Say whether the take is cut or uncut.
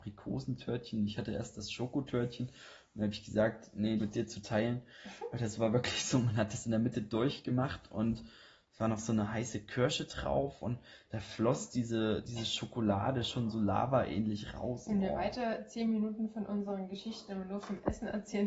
cut